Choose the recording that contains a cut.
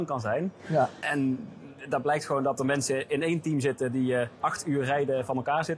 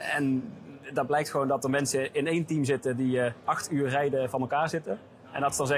first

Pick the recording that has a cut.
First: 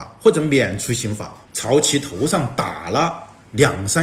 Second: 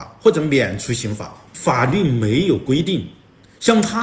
first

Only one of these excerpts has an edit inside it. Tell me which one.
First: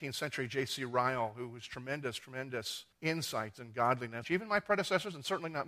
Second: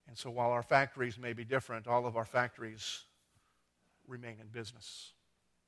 first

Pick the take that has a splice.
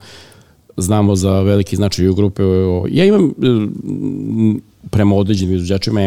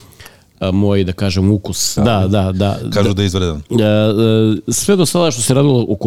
second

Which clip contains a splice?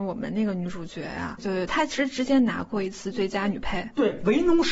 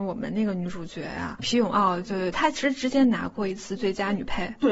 first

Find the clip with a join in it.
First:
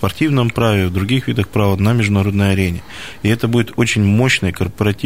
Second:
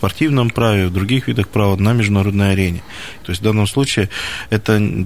second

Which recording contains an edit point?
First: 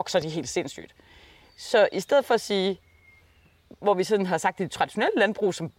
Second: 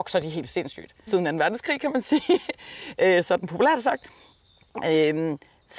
second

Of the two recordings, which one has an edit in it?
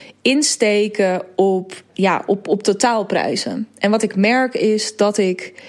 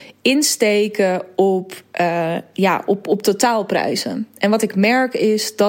first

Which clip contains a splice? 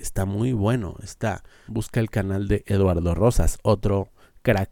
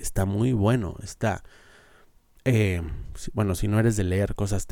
first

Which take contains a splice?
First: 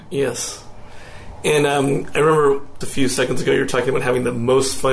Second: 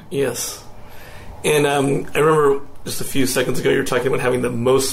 first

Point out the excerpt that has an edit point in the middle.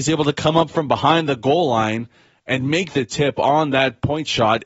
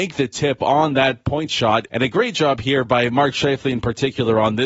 second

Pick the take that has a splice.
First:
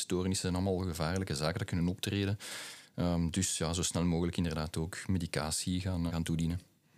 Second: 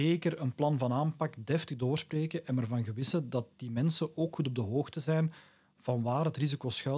first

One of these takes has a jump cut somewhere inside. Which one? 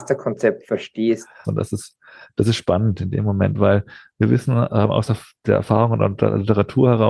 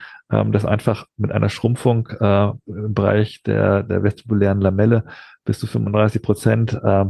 first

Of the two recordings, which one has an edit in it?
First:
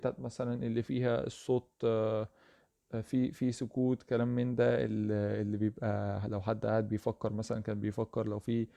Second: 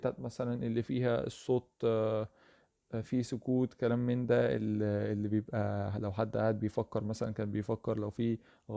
second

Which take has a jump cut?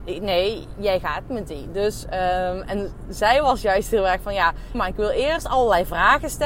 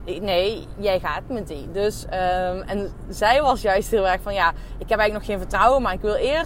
first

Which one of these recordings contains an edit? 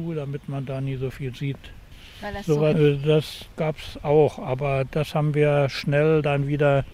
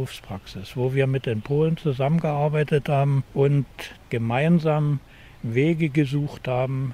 first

